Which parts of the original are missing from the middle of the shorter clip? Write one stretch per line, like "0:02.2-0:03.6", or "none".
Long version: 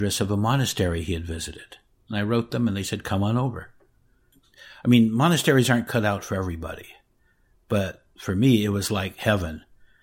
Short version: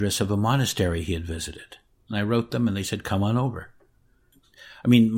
none